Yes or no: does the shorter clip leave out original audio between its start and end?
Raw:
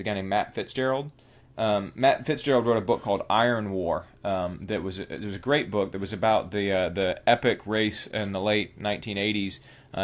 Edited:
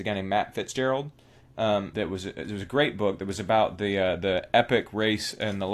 yes